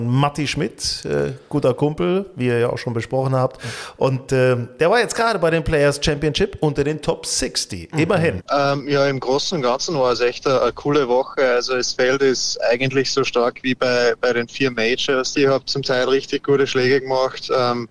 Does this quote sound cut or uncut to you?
cut